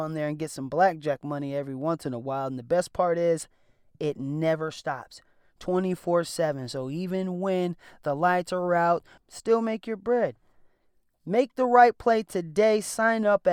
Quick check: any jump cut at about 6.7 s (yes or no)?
no